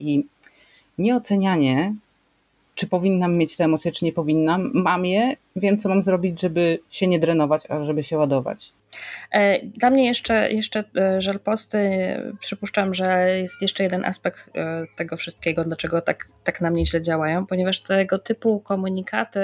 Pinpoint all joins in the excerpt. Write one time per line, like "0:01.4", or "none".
none

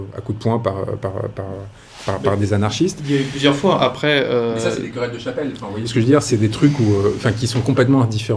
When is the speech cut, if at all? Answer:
none

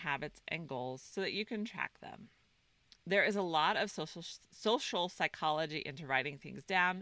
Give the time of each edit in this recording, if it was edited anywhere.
none

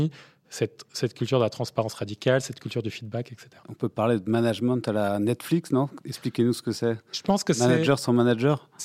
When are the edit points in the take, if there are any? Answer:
0:03.6

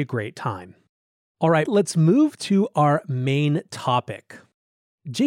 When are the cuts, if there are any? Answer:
0:01.7

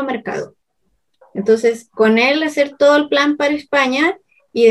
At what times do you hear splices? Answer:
0:01.2

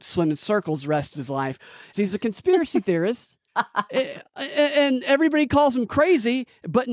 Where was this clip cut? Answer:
0:01.9
0:03.5

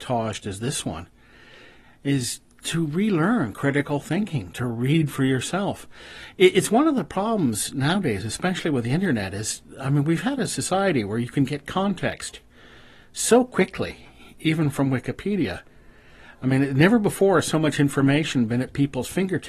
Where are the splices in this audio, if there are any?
none

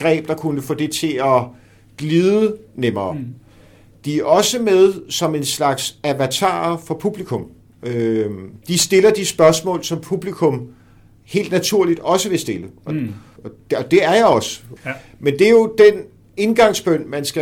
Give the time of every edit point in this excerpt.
0:13.4
0:14.8

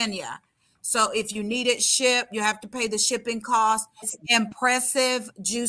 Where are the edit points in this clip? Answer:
0:04.0

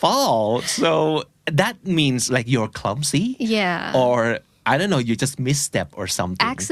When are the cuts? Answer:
none

